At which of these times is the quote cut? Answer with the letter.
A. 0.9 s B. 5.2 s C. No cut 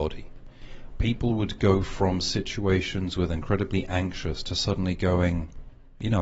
A